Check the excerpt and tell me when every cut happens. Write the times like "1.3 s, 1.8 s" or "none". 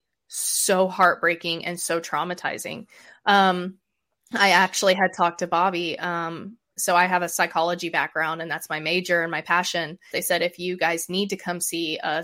6.7 s, 10.1 s